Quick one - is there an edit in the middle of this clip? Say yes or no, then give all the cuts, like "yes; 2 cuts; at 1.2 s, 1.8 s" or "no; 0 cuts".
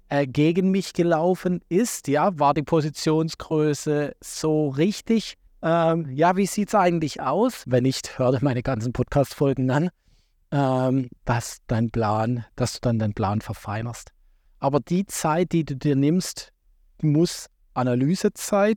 yes; 3 cuts; at 5.5 s, 7.6 s, 14.5 s